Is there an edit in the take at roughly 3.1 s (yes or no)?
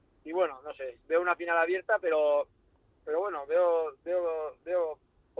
no